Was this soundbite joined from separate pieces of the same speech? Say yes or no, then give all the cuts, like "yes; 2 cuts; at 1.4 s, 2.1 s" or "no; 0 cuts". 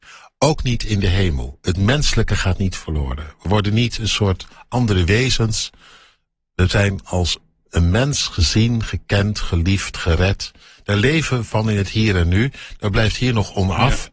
no; 0 cuts